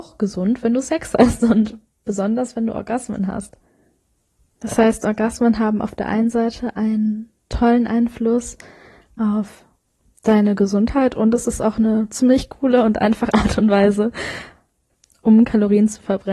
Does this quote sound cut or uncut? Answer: uncut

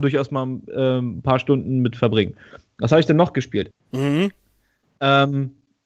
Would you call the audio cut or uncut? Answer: cut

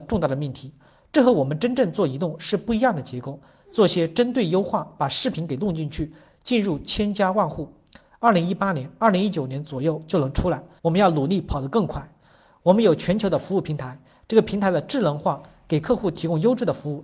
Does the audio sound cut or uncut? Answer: cut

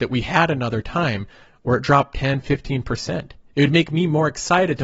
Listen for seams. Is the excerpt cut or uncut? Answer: uncut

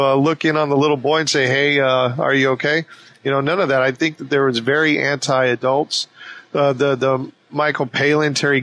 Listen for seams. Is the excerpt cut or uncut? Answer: uncut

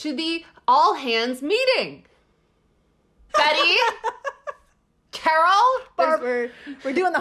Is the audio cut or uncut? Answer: cut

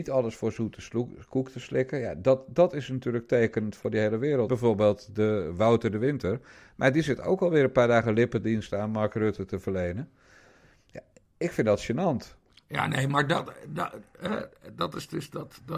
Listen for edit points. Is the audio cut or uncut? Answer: cut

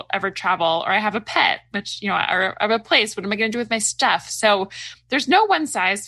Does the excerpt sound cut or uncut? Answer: uncut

